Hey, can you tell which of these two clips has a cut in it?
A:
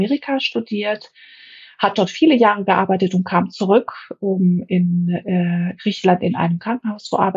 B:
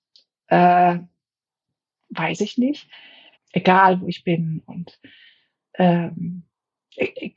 B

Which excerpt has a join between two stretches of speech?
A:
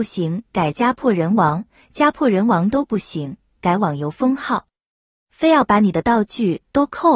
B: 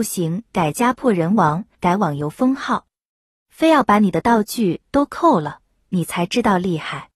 B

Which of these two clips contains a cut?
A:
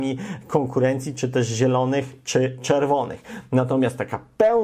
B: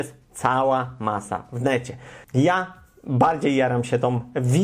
B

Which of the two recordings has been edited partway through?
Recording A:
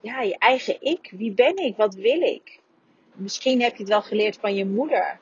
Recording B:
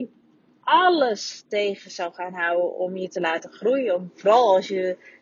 A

